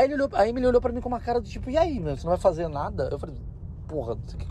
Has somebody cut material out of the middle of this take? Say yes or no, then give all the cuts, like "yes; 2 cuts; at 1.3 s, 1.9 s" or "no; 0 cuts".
no; 0 cuts